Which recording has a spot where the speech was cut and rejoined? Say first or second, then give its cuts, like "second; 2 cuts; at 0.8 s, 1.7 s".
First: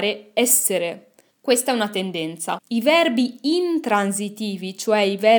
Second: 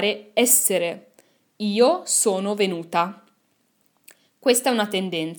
first; 2 cuts; at 1.3 s, 2.6 s